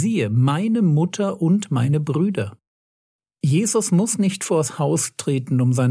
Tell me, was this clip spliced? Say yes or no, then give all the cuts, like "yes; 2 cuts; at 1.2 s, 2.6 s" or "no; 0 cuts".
no; 0 cuts